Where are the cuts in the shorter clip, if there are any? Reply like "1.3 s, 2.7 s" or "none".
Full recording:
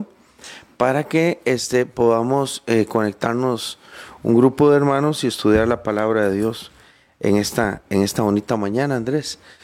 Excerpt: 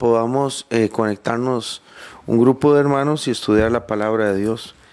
none